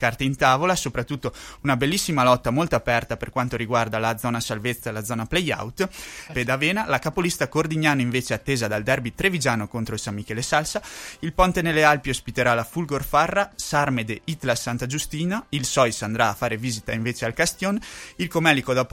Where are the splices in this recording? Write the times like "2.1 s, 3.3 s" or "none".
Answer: 6.3 s